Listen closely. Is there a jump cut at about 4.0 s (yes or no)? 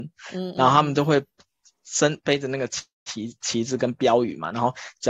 no